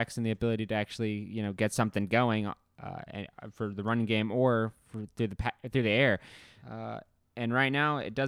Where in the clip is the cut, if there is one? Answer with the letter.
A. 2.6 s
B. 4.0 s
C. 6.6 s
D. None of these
C